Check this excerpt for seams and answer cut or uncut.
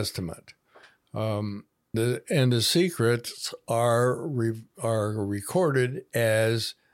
cut